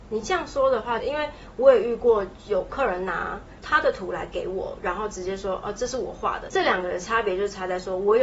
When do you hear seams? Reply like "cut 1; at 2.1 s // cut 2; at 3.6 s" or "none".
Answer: cut 1; at 1.0 s // cut 2; at 6.5 s